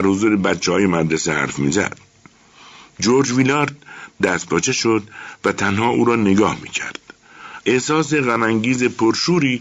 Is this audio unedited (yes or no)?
no